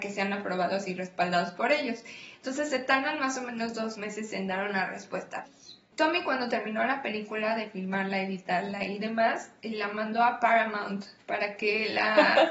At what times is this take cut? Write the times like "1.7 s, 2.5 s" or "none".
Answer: 5.5 s

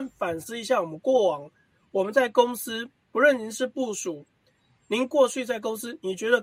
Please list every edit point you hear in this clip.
none

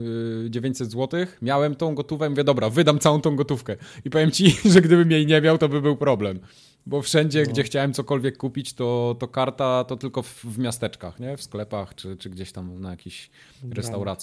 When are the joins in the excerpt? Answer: none

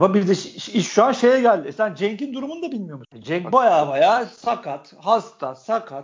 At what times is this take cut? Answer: none

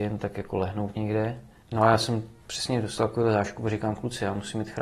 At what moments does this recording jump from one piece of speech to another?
1.6 s

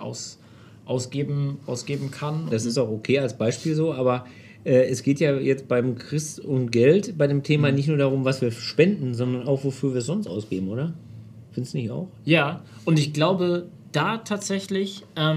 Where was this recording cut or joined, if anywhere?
2.5 s

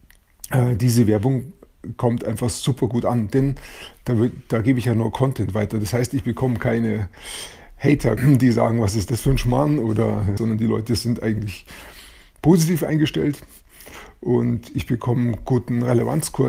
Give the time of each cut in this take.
8.2 s, 10.4 s

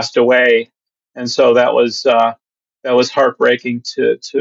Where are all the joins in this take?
none

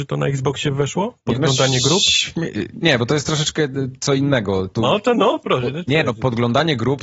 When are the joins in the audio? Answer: 2.8 s

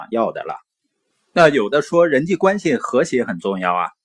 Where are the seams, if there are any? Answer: 1.1 s

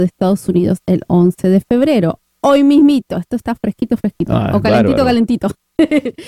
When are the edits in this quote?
none

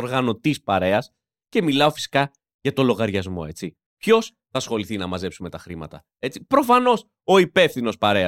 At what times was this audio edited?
3.8 s

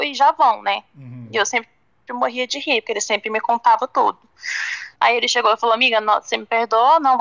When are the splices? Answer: none

